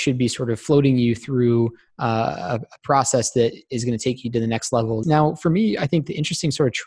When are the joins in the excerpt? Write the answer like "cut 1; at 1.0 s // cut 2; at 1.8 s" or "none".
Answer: cut 1; at 5.0 s